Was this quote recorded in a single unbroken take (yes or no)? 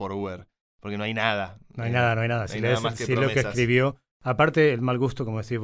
yes